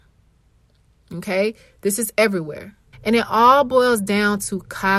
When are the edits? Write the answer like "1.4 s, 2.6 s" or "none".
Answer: 2.9 s